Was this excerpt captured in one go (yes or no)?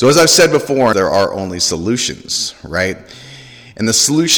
no